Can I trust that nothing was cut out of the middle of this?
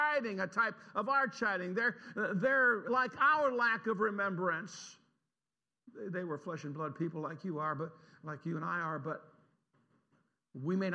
no; 1 cut; at 2.9 s

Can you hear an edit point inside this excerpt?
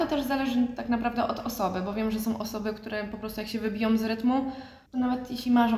yes; 1 cut; at 4.9 s

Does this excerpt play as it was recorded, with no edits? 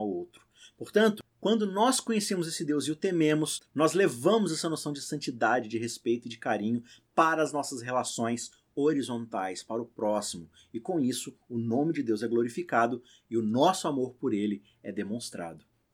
yes; 0 cuts

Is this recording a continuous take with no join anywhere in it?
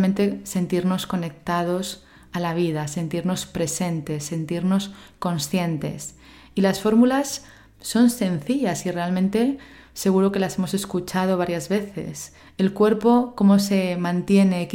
yes; 0 cuts

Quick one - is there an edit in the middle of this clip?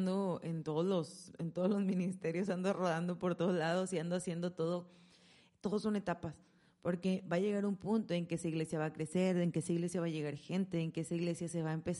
no; 0 cuts

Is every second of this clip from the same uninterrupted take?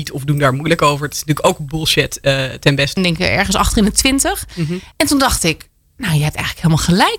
no; 2 cuts; at 3.0 s, 4.9 s

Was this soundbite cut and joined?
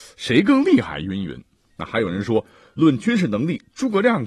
yes; 1 cut; at 1.7 s

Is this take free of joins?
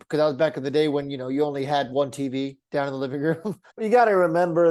no; 1 cut; at 3.7 s

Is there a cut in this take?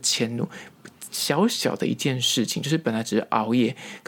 no; 0 cuts

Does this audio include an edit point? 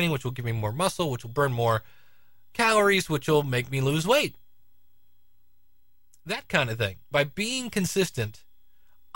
yes; 1 cut; at 7.1 s

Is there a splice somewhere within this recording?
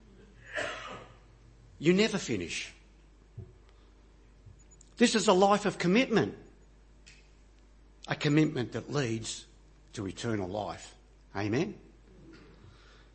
no; 0 cuts

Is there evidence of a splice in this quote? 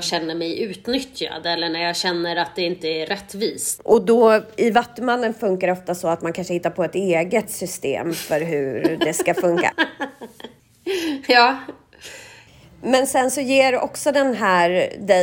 yes; 1 cut; at 3.8 s

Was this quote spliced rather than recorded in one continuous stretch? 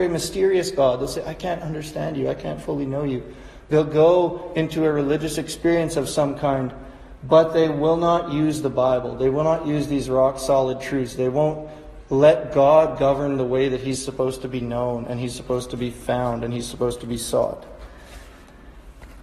no; 0 cuts

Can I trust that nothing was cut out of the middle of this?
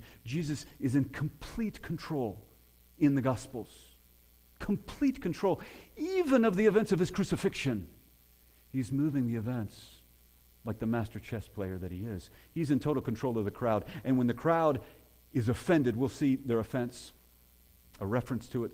yes; 0 cuts

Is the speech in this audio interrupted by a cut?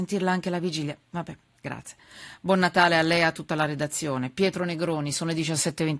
no; 0 cuts

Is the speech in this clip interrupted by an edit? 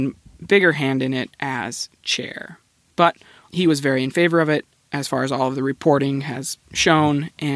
yes; 1 cut; at 3.5 s

